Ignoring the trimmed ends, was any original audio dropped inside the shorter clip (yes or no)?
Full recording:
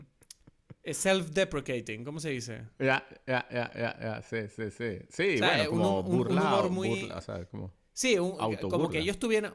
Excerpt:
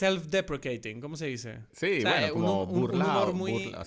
yes